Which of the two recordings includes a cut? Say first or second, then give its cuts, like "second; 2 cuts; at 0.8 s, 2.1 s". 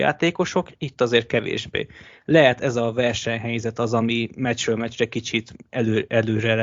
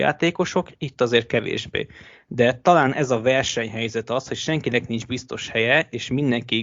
first; 1 cut; at 2.2 s